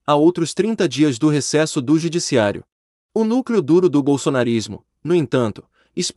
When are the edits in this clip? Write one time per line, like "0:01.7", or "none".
0:02.9